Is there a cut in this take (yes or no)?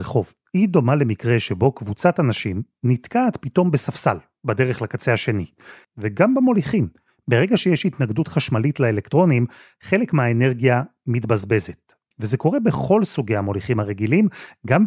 yes